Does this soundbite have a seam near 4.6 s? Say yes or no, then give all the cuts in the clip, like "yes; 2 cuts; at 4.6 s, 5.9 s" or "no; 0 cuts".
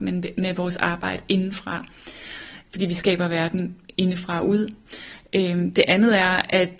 no; 0 cuts